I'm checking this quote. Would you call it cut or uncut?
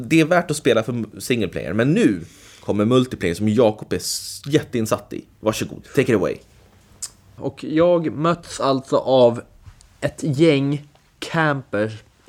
cut